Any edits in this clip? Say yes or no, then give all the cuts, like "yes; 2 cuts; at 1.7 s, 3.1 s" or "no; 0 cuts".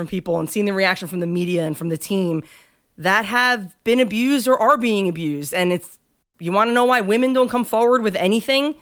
no; 0 cuts